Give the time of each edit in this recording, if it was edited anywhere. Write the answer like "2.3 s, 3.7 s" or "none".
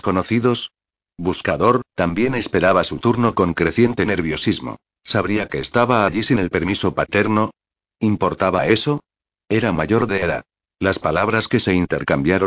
1.9 s, 5.0 s, 10.6 s